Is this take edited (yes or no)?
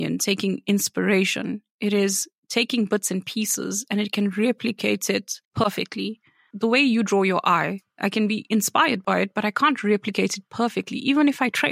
yes